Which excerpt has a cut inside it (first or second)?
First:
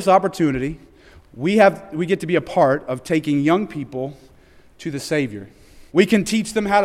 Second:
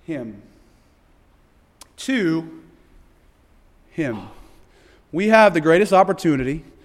first